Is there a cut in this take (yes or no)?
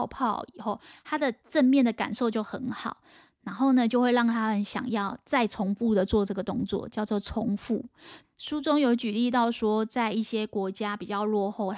yes